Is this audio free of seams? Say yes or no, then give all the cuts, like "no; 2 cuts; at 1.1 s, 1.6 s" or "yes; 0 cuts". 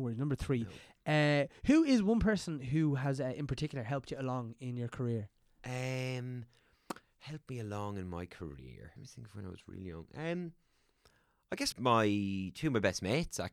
no; 2 cuts; at 9.0 s, 11.7 s